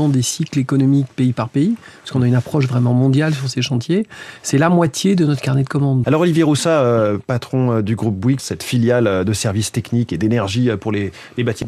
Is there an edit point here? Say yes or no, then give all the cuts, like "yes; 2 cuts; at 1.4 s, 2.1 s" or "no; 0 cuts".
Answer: yes; 2 cuts; at 6.0 s, 8.4 s